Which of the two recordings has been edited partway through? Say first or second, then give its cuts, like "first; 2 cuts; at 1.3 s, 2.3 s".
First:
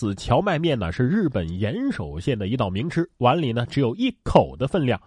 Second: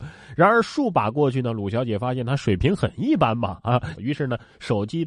second; 1 cut; at 4.0 s